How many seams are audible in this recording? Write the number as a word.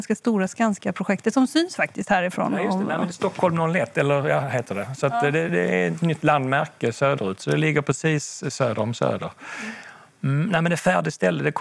one